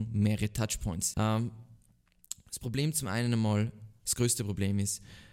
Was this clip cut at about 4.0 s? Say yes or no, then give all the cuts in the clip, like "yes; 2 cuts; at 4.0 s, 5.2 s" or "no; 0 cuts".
no; 1 cut; at 1.1 s